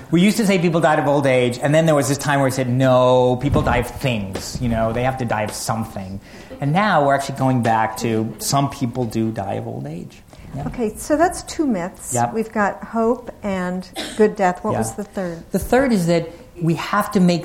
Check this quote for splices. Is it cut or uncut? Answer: uncut